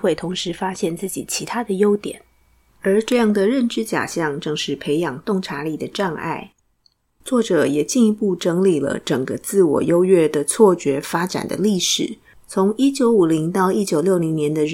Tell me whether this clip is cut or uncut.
cut